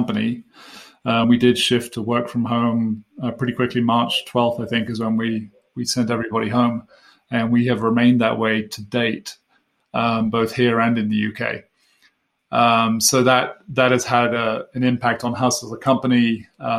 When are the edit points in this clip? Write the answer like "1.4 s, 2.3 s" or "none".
none